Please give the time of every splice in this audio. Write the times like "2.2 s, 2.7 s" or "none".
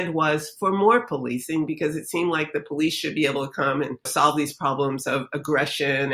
4.1 s